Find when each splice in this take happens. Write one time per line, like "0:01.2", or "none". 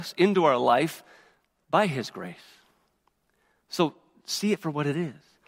none